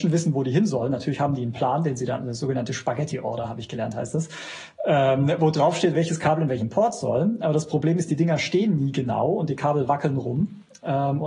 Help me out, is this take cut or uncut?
uncut